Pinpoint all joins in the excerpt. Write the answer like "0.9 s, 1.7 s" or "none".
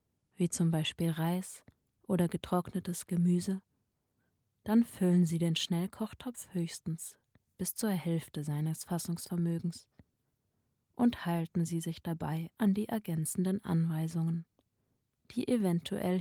none